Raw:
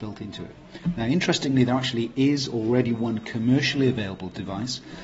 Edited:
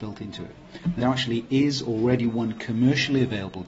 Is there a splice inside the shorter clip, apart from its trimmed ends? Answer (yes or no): yes